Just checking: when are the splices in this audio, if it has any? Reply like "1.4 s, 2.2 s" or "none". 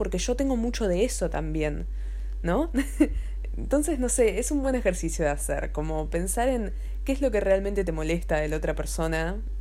none